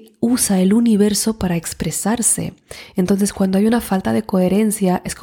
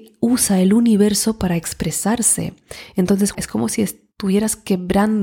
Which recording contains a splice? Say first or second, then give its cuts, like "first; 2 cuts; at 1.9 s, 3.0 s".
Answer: second; 1 cut; at 3.3 s